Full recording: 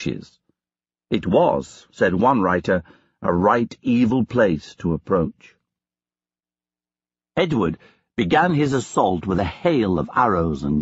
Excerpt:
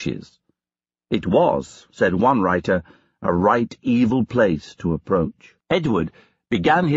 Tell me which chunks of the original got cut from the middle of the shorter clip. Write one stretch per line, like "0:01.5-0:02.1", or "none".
0:05.6-0:07.3